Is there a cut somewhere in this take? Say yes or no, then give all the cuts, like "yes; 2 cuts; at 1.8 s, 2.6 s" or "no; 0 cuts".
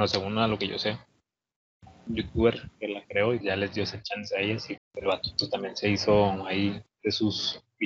yes; 2 cuts; at 3.4 s, 4.8 s